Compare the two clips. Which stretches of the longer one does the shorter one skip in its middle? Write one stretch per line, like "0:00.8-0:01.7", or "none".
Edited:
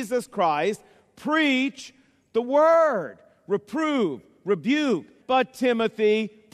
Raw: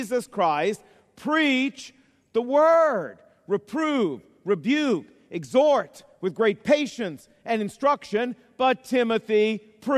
0:05.2-0:08.5